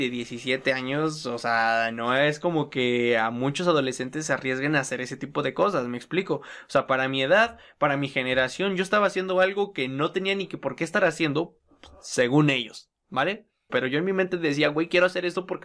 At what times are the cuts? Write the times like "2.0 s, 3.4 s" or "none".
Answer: 13.7 s